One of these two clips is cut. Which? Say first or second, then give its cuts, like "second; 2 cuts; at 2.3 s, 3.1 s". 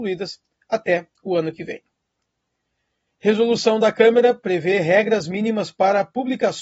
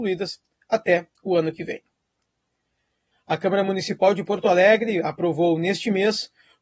second; 1 cut; at 3.1 s